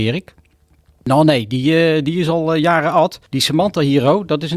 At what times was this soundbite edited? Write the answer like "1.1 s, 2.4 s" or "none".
none